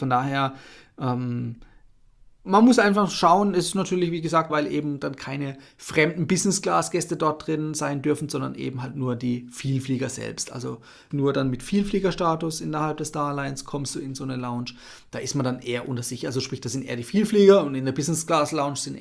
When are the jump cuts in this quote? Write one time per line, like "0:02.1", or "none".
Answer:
0:04.5
0:11.1

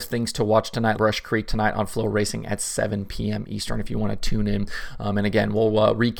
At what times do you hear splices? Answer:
0:01.0

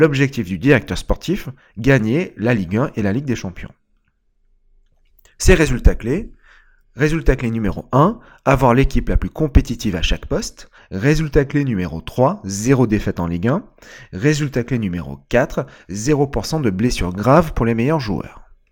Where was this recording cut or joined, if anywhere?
0:10.8

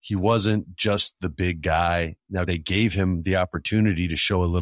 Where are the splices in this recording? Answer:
0:02.5

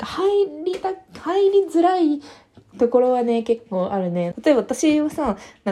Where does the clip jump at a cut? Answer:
0:04.3

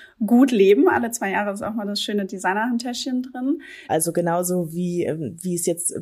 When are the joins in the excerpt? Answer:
0:03.9

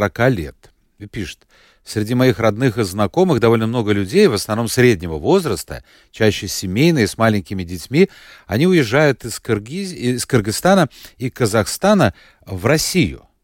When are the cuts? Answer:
none

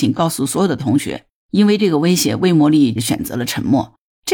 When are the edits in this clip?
0:01.4

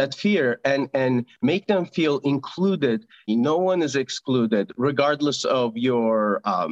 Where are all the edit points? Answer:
0:03.3

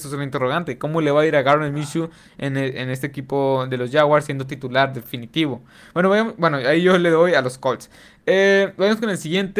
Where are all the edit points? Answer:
none

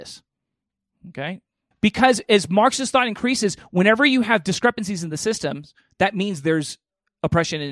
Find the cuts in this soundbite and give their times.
0:01.7

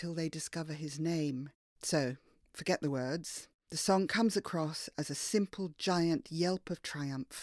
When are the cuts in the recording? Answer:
0:01.7

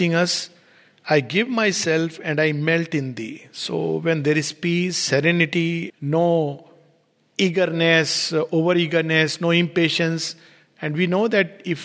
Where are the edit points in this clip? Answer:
0:05.9

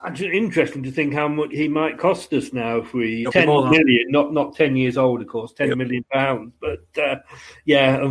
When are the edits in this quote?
0:01.5
0:03.2

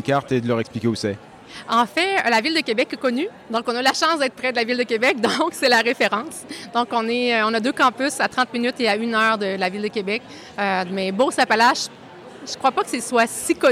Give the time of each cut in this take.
none

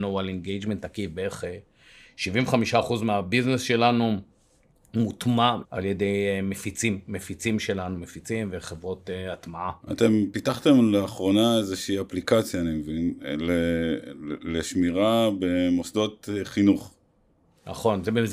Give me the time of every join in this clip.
0:05.6
0:09.8

